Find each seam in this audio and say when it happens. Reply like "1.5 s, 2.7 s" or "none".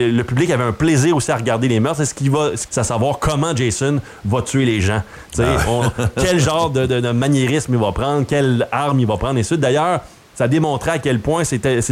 2.7 s